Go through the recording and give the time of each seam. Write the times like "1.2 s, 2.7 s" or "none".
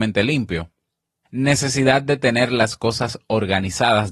1.2 s